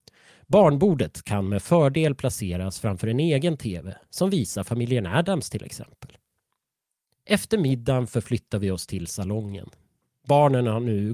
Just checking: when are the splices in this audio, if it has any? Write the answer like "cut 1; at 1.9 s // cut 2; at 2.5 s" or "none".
none